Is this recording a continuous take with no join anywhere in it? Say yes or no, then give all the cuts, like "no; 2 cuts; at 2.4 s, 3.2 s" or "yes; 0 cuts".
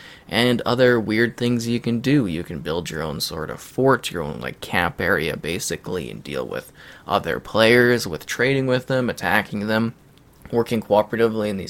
yes; 0 cuts